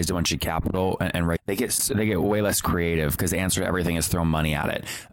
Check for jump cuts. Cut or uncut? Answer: cut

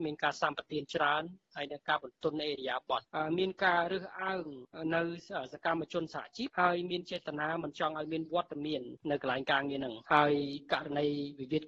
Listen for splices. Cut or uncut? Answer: uncut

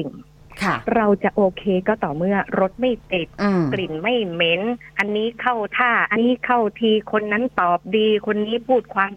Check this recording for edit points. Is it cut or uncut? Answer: cut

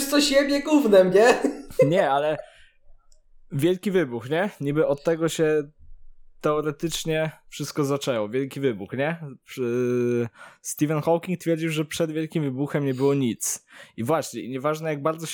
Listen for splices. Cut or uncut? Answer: uncut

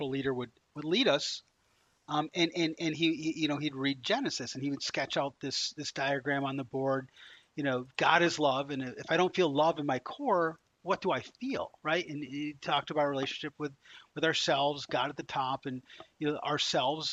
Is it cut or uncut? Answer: uncut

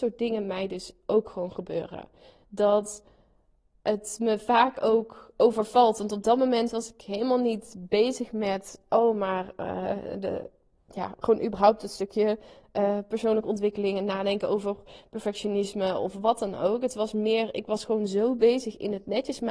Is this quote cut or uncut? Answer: uncut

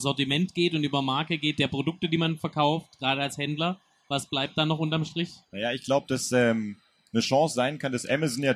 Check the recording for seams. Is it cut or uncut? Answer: cut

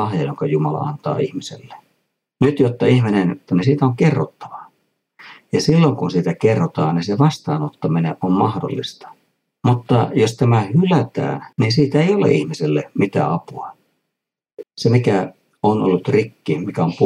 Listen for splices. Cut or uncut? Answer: cut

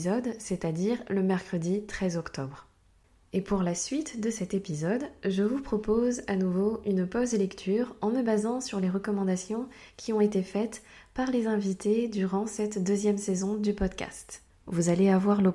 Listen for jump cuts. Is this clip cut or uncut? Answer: cut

